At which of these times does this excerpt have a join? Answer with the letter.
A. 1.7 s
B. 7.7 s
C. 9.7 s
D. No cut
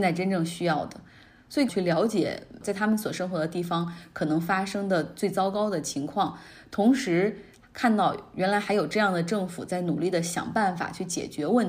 A